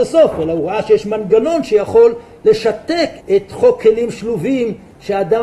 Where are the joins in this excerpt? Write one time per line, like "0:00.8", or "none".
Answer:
0:03.2